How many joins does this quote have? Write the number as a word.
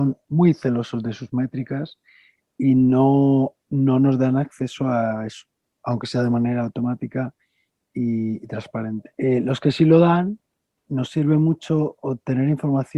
two